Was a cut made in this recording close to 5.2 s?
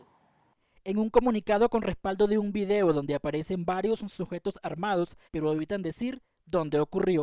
yes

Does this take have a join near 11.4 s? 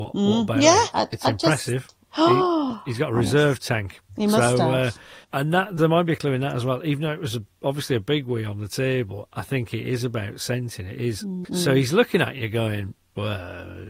yes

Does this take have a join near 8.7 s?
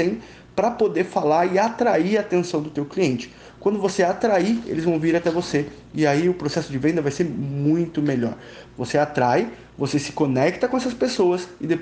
yes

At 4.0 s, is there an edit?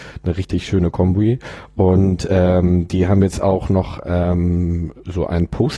no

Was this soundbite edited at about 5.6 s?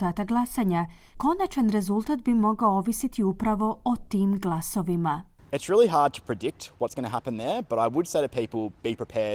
no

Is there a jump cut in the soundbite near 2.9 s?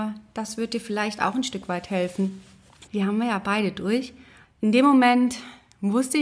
yes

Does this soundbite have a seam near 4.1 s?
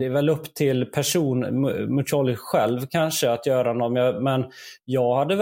no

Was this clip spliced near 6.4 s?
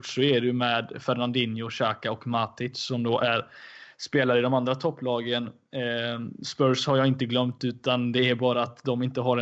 no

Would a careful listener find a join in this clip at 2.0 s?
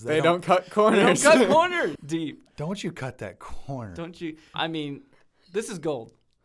yes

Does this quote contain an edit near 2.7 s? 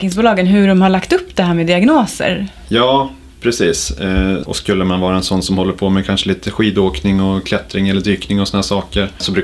no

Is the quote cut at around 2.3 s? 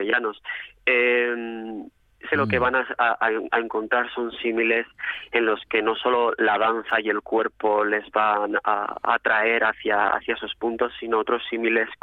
yes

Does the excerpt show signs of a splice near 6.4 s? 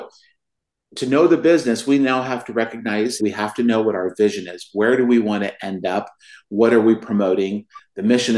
no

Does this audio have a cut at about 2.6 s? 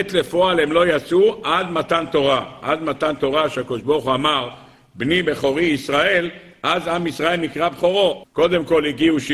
no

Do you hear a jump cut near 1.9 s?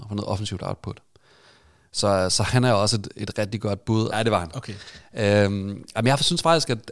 no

